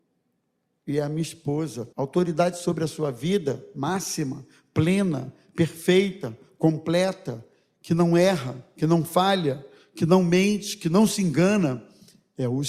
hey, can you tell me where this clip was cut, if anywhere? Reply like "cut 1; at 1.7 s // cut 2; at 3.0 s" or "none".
cut 1; at 1.9 s